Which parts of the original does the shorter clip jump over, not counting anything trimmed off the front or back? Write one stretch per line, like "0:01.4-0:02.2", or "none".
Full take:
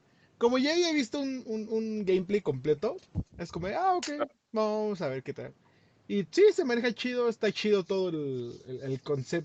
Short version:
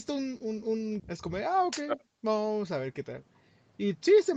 0:02.0-0:03.3